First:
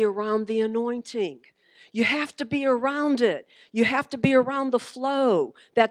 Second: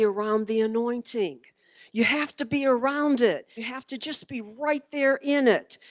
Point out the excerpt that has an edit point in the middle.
second; 1 cut; at 3.6 s

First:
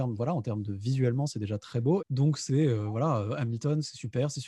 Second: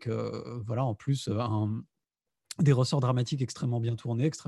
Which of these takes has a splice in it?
first; 1 cut; at 2.0 s

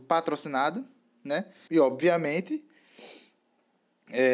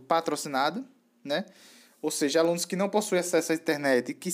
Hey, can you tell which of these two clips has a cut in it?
first; 1 cut; at 1.7 s

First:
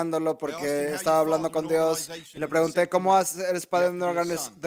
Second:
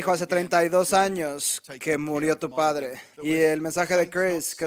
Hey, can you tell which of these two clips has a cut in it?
second; 1 cut; at 3.1 s

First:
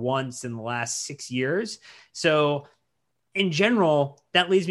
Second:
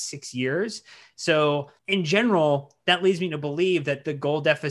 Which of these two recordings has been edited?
second; 1 cut; at 1.8 s

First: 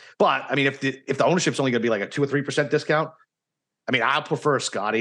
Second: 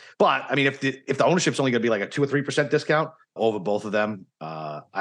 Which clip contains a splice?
second; 1 cut; at 3.4 s

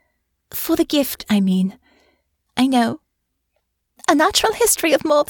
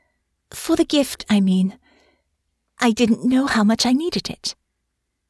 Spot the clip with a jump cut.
first; 1 cut; at 2.5 s

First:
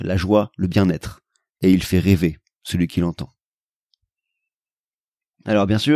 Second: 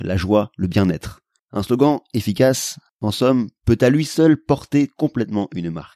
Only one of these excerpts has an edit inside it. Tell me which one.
second; 1 cut; at 1.4 s

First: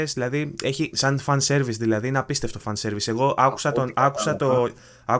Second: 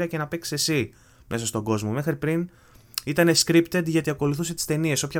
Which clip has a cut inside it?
first; 1 cut; at 0.9 s

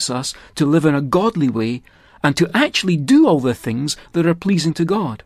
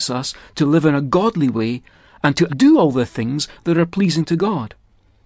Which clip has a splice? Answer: second; 1 cut; at 2.5 s

